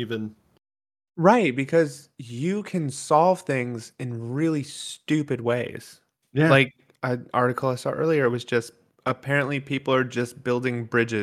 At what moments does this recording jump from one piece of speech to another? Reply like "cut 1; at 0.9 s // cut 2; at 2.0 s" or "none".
none